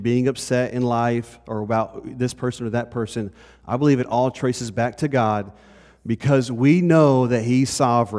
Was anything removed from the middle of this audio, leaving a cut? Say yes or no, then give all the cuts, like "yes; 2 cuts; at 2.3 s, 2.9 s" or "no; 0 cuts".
no; 0 cuts